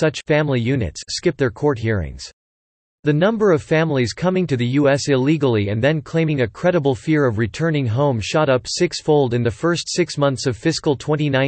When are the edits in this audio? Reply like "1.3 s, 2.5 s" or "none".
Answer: 2.9 s